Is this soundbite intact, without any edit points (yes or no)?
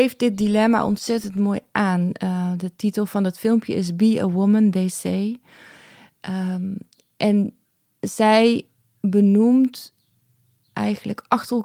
yes